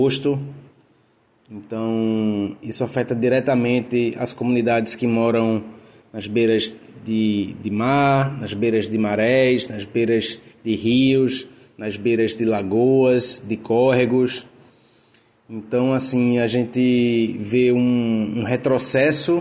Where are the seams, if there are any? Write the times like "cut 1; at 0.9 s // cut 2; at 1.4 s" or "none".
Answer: none